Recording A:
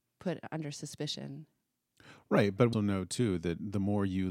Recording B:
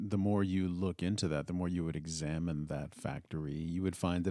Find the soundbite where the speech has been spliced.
A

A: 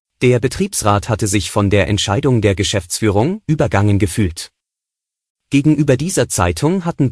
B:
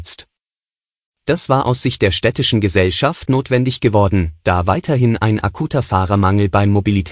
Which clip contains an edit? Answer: A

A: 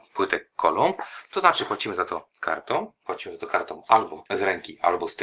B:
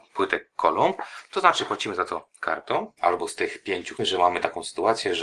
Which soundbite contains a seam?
B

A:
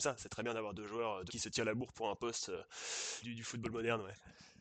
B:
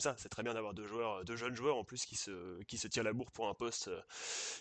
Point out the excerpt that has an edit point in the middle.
A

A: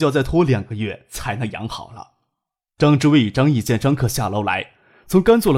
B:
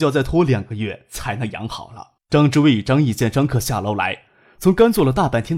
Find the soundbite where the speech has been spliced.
B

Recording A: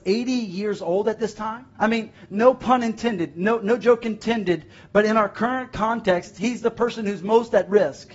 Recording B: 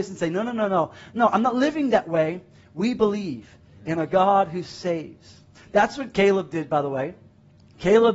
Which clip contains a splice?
A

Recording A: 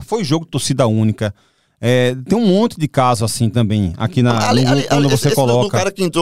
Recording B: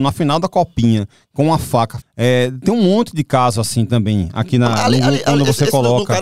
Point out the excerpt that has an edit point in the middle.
B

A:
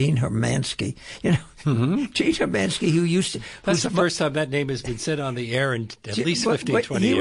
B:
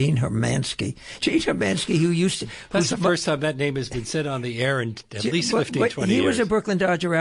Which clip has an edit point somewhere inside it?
B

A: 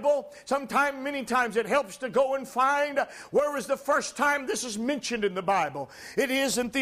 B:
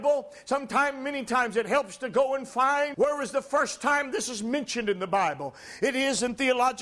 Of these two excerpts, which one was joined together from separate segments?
B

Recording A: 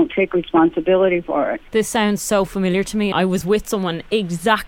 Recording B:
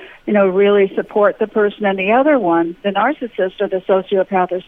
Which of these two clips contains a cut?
A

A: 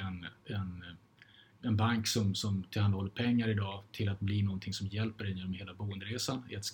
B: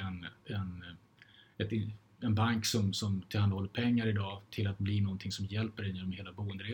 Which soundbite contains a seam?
A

